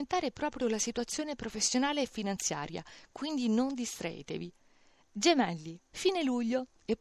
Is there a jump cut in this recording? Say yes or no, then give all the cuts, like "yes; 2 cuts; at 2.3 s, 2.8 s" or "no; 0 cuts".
yes; 1 cut; at 5.9 s